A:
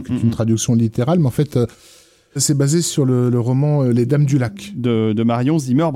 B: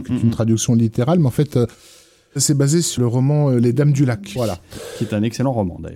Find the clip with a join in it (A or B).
B